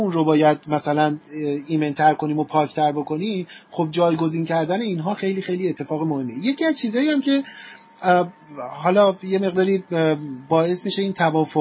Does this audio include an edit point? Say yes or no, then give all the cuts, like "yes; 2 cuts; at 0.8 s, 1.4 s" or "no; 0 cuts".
yes; 1 cut; at 5.2 s